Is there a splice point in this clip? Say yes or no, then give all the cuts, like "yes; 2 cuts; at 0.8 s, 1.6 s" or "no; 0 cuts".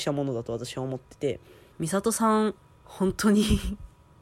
yes; 1 cut; at 1.7 s